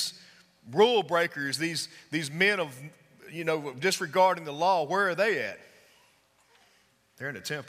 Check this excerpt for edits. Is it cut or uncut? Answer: uncut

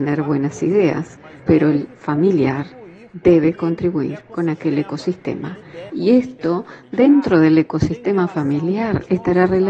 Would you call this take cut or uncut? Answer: cut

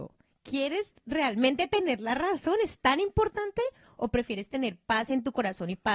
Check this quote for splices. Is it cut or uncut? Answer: uncut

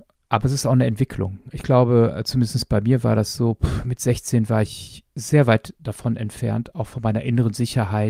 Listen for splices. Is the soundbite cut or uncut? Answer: uncut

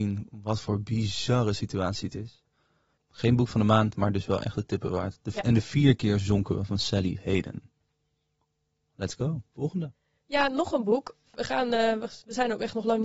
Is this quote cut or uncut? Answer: cut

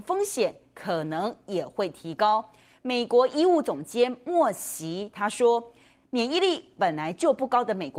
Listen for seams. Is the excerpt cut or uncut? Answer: uncut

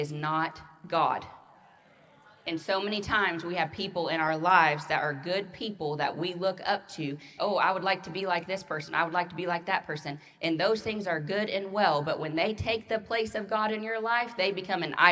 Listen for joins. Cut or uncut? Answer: cut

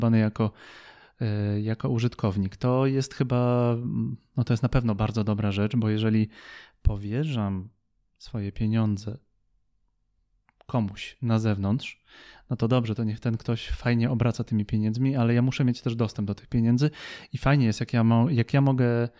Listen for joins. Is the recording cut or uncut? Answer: uncut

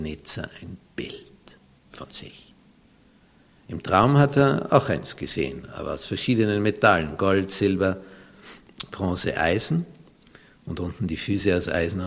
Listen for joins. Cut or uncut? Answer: uncut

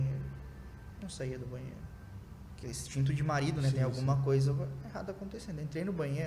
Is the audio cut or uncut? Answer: cut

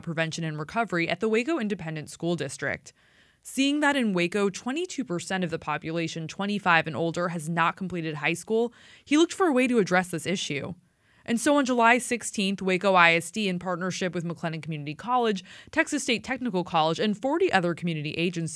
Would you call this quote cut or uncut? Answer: uncut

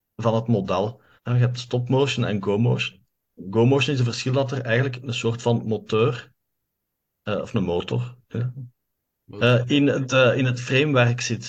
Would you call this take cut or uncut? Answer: cut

